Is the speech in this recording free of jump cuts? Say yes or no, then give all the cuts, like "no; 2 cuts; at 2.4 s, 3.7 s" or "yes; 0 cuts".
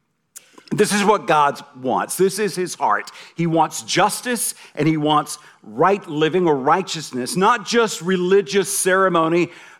yes; 0 cuts